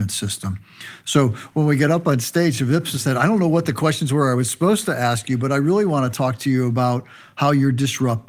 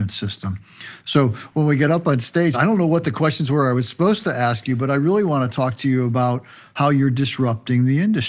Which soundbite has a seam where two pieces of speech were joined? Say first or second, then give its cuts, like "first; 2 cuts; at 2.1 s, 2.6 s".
second; 1 cut; at 2.5 s